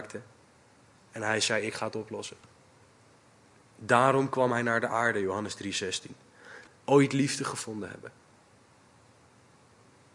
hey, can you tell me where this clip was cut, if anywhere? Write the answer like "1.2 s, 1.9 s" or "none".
6.7 s